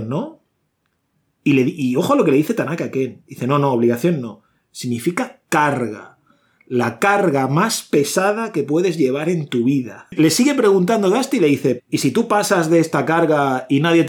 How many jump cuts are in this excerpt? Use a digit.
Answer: 2